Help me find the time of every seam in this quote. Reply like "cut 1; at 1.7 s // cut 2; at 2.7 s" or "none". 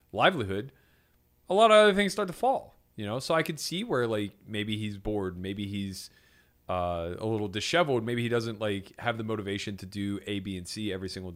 none